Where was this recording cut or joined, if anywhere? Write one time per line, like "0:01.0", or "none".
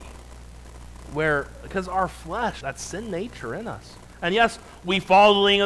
0:02.6

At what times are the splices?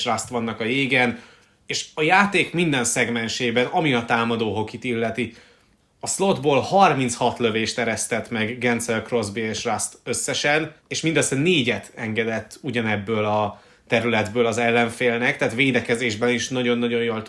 0:05.8
0:10.8

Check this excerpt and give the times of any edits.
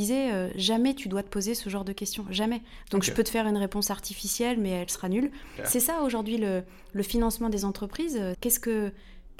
0:05.6
0:08.3

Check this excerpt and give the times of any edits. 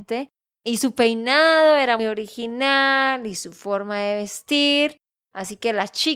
0:02.0

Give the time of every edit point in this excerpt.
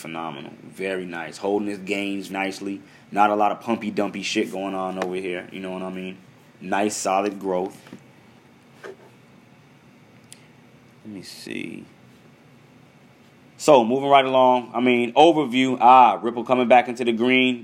0:02.3

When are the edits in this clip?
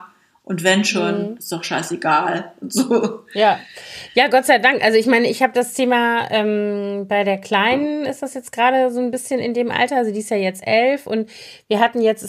none

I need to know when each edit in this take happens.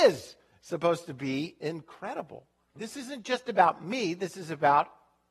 0:02.8

